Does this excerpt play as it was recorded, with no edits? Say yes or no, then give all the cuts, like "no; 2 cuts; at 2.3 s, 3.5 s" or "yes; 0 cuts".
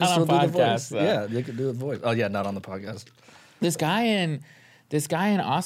yes; 0 cuts